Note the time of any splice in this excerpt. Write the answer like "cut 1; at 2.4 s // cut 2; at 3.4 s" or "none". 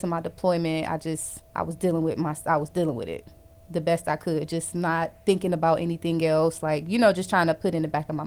cut 1; at 1.5 s